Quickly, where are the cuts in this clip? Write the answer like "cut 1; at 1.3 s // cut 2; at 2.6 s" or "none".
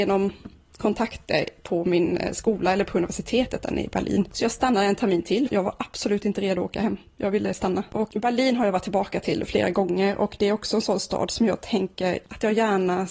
cut 1; at 5.5 s